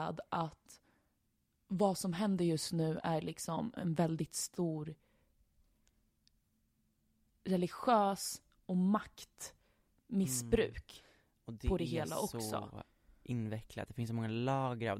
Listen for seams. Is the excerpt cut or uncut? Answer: uncut